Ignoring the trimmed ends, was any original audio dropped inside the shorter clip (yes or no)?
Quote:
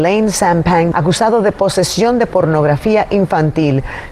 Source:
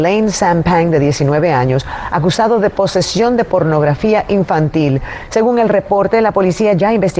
yes